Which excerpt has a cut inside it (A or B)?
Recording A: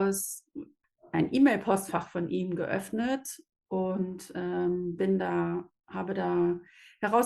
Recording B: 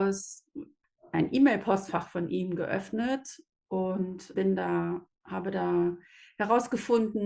B